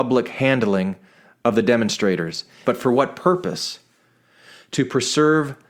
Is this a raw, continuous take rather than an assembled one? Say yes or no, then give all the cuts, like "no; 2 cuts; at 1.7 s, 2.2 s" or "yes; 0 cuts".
no; 1 cut; at 2.6 s